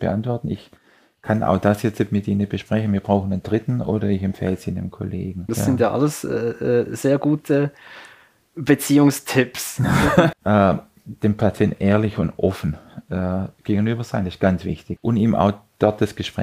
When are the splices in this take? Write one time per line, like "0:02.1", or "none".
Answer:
0:05.5
0:10.3
0:15.0